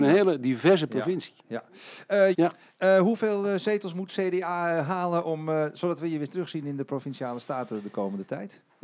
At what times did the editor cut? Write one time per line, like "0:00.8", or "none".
0:02.3